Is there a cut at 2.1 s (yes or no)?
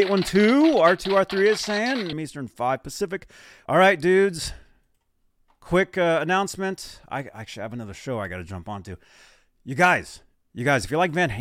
yes